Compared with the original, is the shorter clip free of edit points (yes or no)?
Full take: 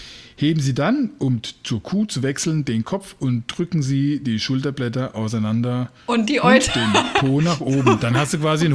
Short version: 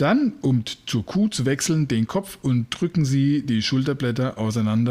yes